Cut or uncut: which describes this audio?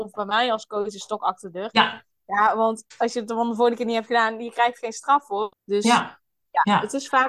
cut